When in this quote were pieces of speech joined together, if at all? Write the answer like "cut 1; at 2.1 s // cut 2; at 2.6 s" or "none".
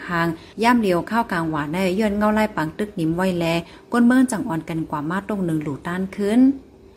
none